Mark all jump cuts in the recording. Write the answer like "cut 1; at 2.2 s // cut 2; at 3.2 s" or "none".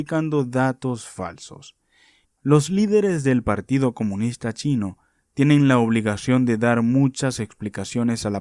cut 1; at 2.2 s